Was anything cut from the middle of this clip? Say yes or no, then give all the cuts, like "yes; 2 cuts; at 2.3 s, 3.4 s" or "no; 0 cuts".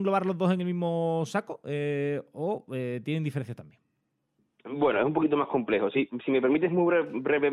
no; 0 cuts